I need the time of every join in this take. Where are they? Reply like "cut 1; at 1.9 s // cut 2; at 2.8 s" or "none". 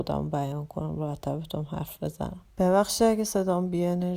cut 1; at 2.5 s